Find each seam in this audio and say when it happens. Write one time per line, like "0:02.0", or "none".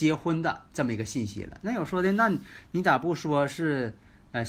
none